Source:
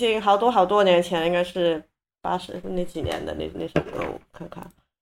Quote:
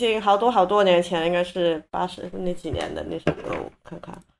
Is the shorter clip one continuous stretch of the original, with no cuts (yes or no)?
no